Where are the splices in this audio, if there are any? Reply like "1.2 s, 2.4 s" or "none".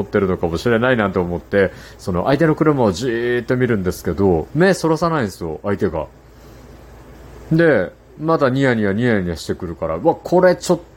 none